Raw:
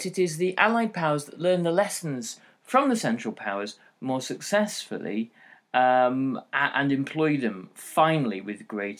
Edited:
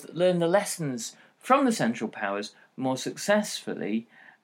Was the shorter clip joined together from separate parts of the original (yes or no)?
no